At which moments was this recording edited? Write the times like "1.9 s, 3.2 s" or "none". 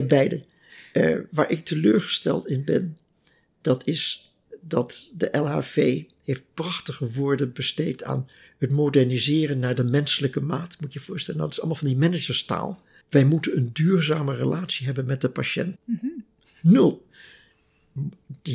13.0 s, 15.8 s

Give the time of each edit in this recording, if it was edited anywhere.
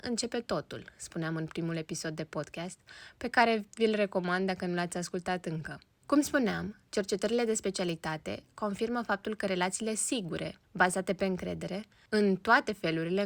6.0 s, 12.1 s

